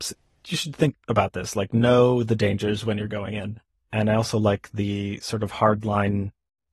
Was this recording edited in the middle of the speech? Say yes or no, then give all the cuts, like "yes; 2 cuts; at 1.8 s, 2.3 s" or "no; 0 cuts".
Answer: no; 0 cuts